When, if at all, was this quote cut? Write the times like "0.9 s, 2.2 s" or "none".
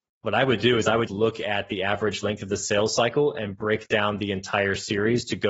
1.1 s